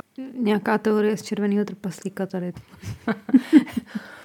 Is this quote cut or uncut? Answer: uncut